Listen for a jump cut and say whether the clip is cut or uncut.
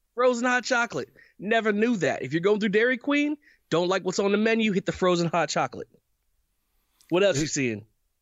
uncut